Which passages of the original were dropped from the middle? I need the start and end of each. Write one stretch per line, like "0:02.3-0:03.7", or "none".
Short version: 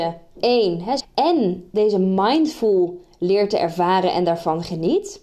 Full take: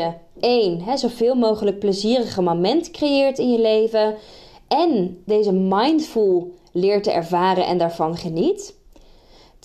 0:01.0-0:04.5